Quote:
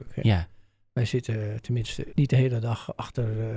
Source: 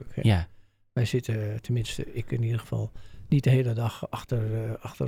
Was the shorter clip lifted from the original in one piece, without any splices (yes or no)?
no